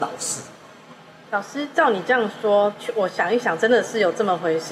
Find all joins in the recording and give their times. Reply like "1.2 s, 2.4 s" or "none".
1.3 s